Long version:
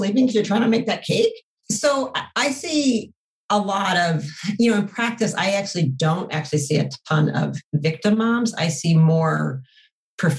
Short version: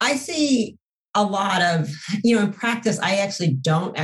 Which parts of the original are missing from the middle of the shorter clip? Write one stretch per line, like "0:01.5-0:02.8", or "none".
none